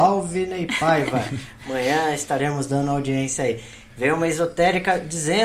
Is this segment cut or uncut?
uncut